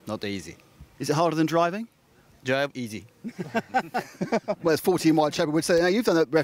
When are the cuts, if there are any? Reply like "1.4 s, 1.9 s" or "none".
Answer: none